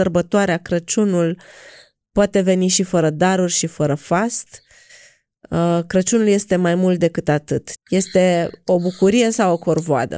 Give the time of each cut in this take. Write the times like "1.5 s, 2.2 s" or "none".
7.8 s

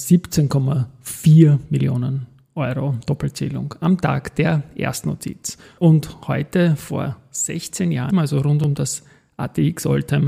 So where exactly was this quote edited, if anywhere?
5.8 s, 8.1 s

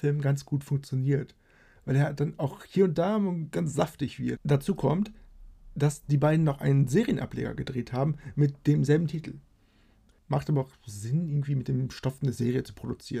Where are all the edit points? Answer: 4.4 s, 10.1 s

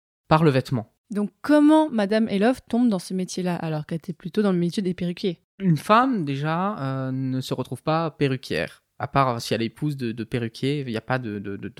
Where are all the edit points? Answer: 5.5 s

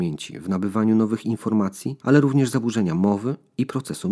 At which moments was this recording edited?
2.0 s

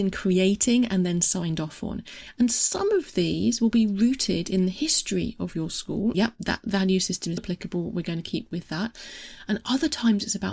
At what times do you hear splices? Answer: 6.1 s, 7.4 s

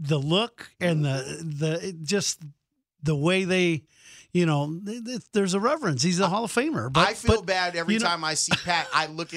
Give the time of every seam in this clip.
none

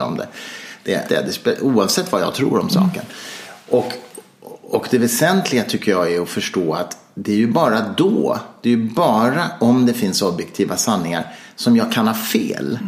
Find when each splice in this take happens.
1.1 s

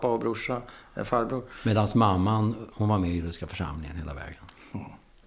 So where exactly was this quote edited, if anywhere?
2.7 s

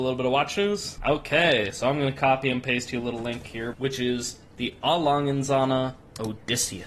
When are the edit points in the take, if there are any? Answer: 1.0 s, 3.7 s

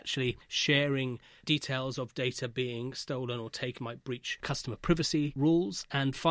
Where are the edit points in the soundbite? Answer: 3.8 s

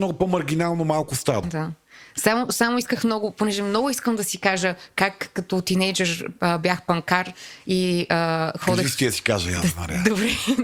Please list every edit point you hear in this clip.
1.4 s

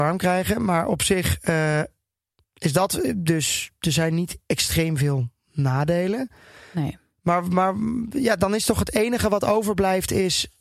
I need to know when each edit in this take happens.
2.4 s

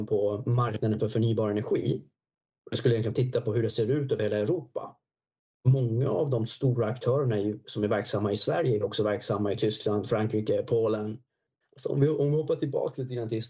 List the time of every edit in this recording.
11.6 s

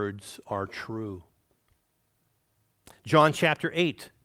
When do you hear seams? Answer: none

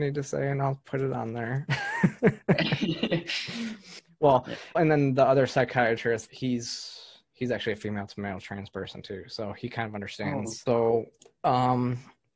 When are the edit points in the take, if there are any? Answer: 4.7 s, 6.3 s

